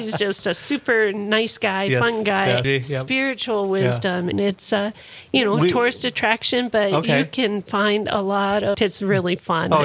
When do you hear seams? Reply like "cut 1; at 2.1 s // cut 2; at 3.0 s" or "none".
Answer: cut 1; at 2.6 s // cut 2; at 4.3 s // cut 3; at 8.7 s